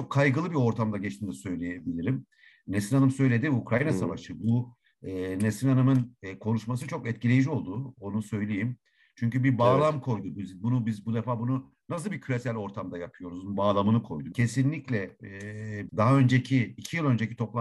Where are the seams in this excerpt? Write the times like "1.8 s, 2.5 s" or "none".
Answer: 14.3 s, 15.9 s